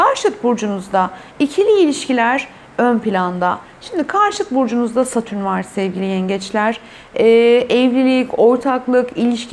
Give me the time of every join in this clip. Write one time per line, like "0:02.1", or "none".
none